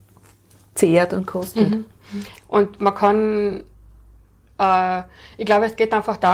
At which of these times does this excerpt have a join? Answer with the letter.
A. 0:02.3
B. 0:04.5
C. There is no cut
A